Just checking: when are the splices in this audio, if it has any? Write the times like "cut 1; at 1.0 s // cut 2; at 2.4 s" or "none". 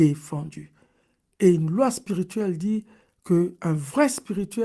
none

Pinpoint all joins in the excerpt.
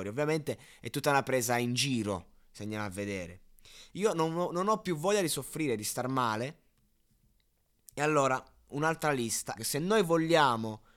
cut 1; at 3.9 s // cut 2; at 9.6 s

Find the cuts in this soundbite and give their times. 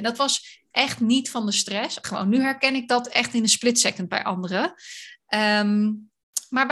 cut 1; at 2.0 s

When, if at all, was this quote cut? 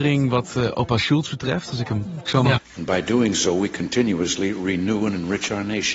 cut 1; at 2.6 s

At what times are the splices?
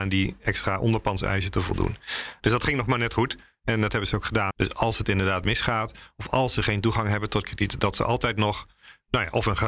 cut 1; at 4.5 s

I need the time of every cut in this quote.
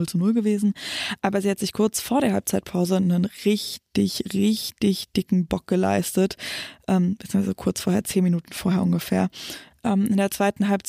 cut 1; at 9.7 s

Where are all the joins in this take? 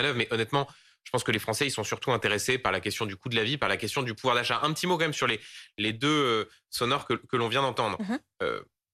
none

